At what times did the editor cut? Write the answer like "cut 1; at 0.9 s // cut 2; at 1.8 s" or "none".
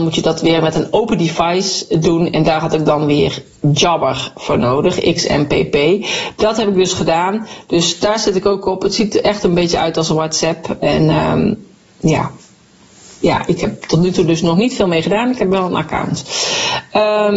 none